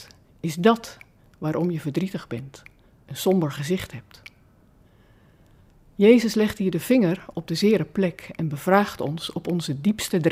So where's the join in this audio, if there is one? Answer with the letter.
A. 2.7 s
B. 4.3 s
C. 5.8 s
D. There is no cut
D